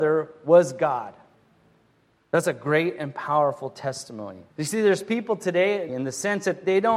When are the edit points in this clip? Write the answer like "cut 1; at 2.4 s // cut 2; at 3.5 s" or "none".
cut 1; at 4.5 s // cut 2; at 5.9 s